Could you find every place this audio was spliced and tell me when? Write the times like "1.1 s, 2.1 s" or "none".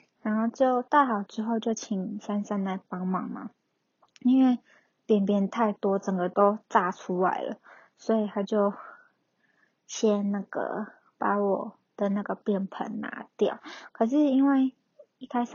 none